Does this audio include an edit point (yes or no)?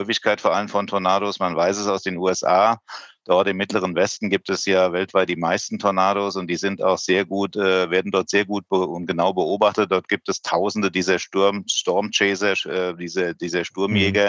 no